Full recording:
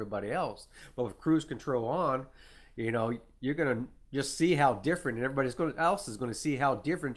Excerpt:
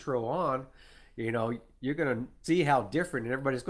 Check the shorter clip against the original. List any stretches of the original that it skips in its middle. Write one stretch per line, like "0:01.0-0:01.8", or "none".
0:04.0-0:04.4